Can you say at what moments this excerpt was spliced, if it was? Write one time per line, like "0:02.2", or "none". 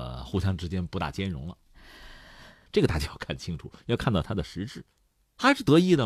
0:02.7